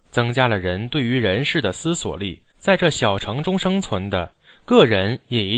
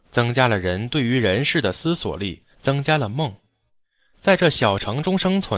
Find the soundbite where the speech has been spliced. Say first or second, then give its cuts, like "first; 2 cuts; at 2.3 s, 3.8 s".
first; 1 cut; at 2.5 s